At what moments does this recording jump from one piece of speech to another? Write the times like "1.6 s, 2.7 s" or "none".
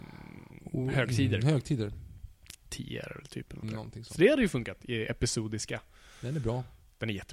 3.6 s